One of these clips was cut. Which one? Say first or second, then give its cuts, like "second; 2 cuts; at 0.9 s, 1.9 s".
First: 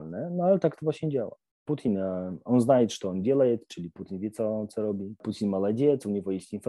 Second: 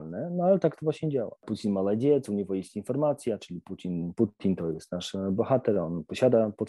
second; 1 cut; at 1.4 s